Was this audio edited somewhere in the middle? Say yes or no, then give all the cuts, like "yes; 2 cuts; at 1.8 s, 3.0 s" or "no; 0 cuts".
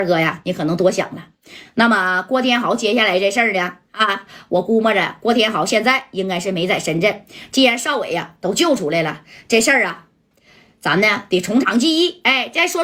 no; 0 cuts